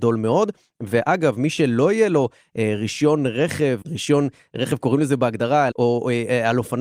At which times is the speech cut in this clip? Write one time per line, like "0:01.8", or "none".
0:03.8
0:05.7